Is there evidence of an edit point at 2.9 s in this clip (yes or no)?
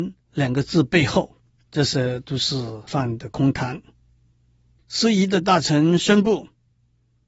yes